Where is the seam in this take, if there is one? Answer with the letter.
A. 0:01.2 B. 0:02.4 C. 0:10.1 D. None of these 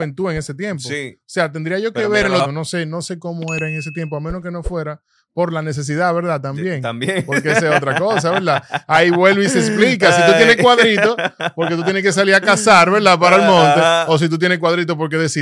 B